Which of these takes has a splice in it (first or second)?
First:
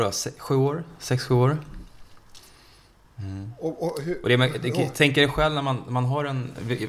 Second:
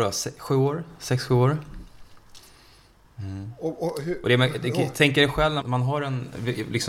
second